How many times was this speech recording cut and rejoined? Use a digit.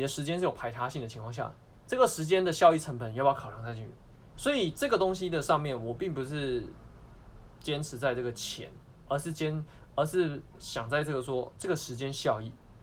2